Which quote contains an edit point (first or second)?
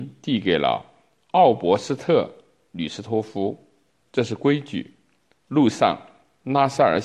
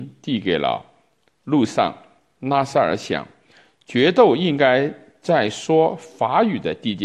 second